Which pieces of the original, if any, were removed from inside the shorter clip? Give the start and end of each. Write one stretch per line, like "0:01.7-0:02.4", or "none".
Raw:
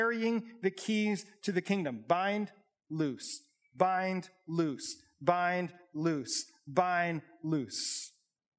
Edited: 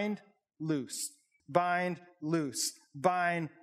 0:03.7-0:05.1